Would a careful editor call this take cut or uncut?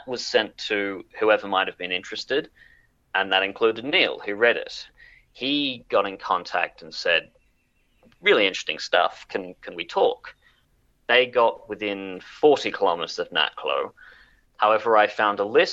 cut